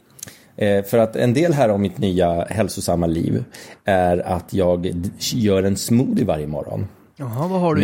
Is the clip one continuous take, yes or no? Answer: yes